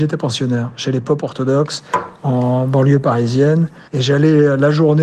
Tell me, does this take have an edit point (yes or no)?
yes